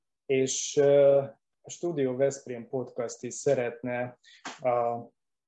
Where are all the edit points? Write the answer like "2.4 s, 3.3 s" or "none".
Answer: none